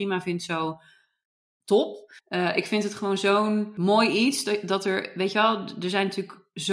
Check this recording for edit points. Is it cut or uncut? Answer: cut